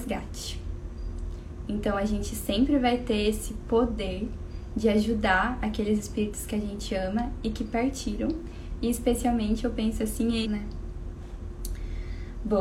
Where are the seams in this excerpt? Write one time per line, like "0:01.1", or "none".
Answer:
0:01.7
0:10.4